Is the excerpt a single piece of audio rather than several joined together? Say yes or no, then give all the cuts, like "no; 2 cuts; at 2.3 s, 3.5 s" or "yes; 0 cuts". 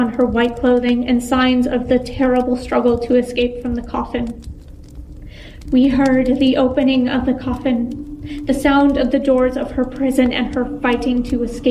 no; 1 cut; at 5.7 s